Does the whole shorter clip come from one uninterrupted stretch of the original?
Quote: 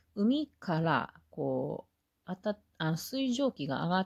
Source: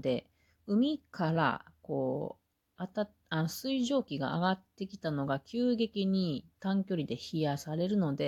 yes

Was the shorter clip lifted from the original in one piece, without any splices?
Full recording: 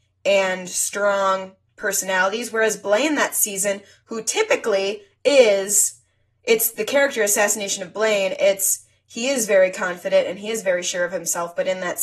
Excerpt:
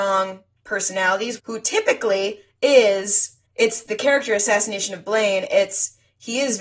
no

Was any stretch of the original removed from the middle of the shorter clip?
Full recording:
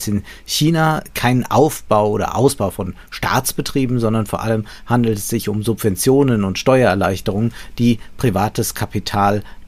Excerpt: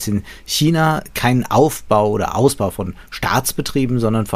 no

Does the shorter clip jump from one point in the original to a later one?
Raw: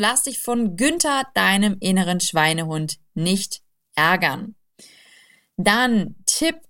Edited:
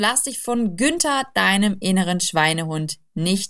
no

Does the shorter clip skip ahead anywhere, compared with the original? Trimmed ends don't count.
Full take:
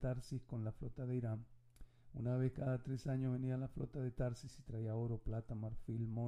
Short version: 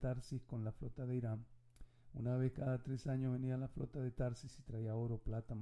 no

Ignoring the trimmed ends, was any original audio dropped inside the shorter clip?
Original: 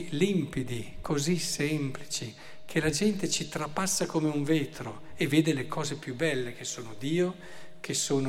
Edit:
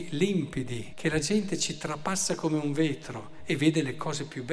yes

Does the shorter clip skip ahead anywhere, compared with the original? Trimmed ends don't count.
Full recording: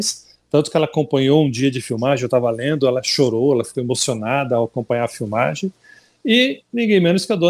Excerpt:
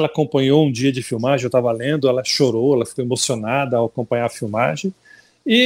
no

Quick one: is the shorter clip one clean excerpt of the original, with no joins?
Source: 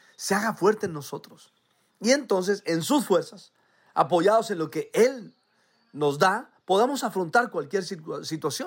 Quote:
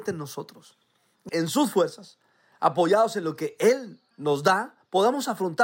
no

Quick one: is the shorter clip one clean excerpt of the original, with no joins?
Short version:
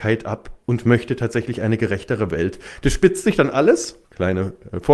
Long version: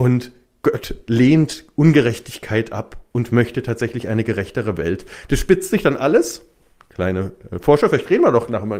no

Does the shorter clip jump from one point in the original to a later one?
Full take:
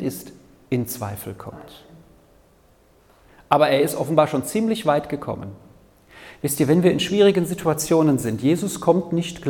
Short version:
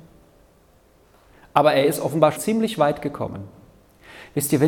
yes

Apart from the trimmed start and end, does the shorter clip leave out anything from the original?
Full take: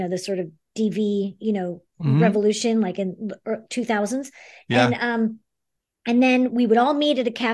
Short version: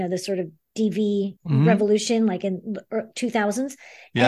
yes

